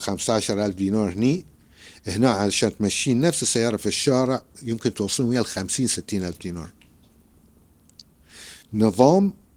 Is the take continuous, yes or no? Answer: no